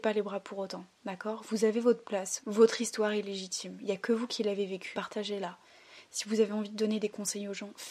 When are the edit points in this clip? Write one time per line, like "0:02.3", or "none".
0:02.4
0:04.9
0:06.1